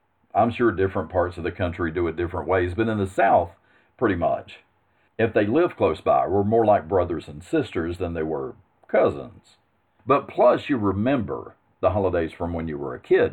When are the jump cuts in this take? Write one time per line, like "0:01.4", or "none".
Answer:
0:05.1
0:10.0